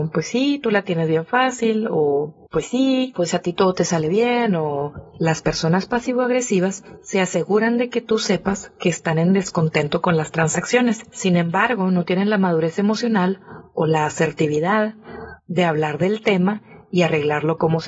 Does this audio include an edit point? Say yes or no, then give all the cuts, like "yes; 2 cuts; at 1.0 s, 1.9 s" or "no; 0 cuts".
yes; 1 cut; at 2.5 s